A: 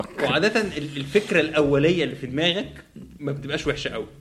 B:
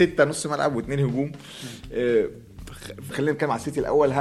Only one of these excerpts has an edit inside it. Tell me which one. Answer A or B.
B